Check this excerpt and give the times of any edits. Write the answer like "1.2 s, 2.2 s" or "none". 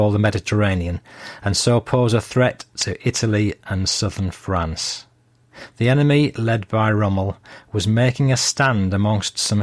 none